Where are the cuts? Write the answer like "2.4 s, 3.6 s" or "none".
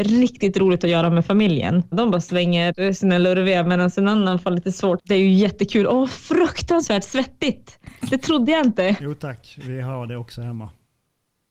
1.9 s, 5.0 s